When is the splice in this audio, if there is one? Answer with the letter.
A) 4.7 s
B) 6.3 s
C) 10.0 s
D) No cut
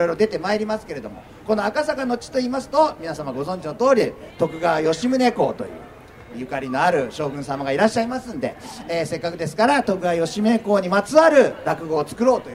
B